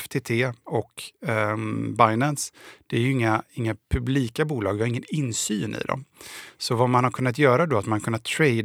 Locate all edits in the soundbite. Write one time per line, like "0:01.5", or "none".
none